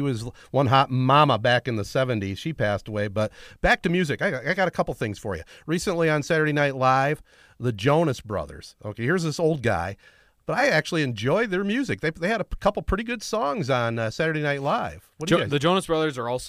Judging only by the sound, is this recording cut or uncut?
uncut